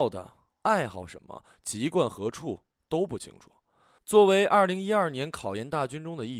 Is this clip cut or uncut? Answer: uncut